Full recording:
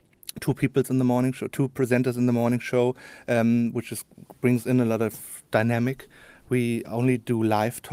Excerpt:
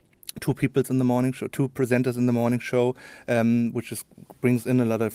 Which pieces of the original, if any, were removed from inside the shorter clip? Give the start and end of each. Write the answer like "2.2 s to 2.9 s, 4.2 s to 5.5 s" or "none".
none

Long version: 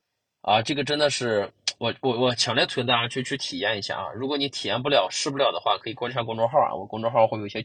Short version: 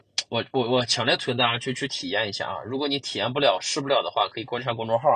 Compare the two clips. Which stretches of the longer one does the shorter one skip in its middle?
none

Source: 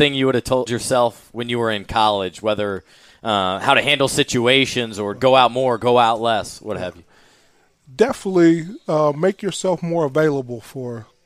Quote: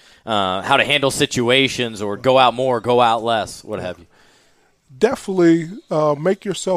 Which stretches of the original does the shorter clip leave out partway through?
none

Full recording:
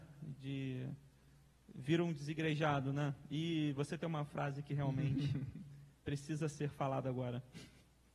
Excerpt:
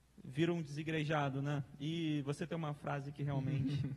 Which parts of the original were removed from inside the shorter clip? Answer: none

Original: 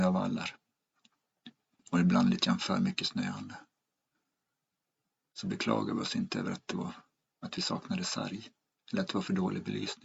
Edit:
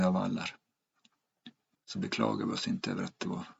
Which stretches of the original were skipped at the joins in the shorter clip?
1.7 s to 5.2 s

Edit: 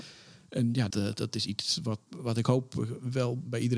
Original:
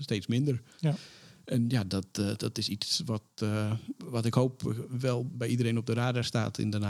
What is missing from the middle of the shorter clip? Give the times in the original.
1.9 s to 2.1 s, 3.3 s to 3.9 s

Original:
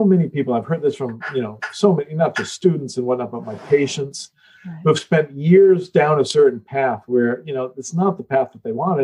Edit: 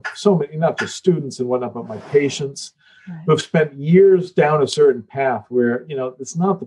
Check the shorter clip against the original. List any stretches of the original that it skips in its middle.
none

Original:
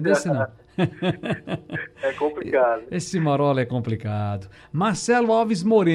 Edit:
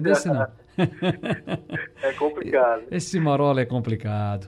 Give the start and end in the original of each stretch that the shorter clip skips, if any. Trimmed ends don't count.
none

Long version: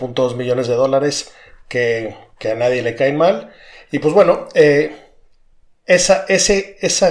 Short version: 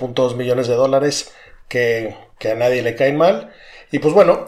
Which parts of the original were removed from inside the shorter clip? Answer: none

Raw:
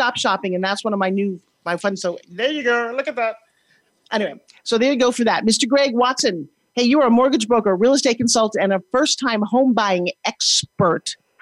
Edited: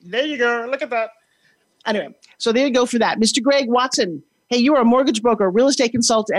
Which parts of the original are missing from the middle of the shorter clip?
none

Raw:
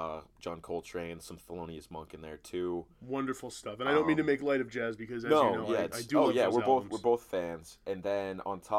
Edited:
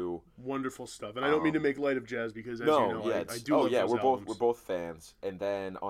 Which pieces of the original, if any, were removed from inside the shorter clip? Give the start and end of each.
none

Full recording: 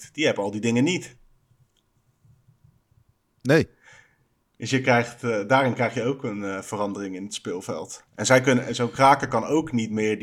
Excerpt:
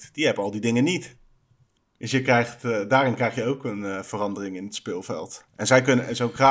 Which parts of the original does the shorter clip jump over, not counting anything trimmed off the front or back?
1.8 s to 4.4 s

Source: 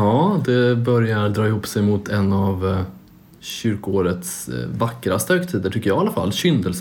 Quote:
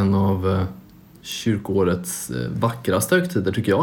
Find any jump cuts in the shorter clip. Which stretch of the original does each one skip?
none

